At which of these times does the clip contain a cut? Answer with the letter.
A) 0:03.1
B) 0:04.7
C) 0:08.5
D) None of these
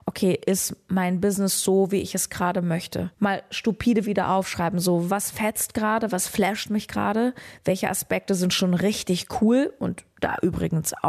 A